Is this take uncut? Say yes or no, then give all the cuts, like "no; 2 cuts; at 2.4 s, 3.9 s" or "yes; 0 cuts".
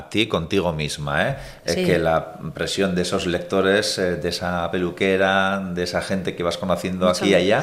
yes; 0 cuts